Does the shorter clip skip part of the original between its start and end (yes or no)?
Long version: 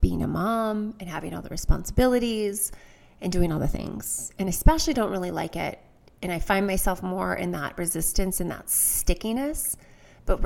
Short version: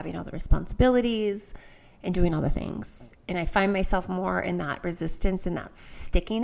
yes